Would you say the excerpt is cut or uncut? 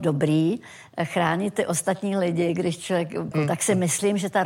cut